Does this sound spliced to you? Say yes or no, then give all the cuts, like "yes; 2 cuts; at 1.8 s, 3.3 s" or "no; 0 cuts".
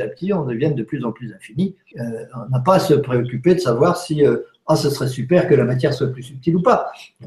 yes; 1 cut; at 1.9 s